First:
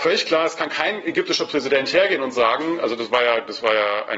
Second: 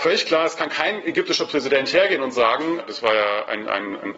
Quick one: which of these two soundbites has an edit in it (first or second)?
second